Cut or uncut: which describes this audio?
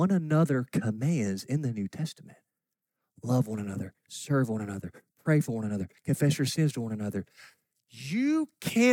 uncut